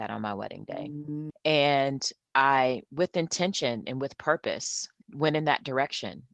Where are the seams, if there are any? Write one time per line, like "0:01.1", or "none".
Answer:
0:01.3
0:05.0